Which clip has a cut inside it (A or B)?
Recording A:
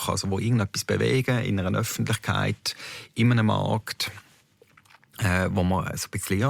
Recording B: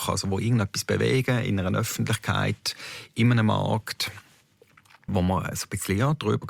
B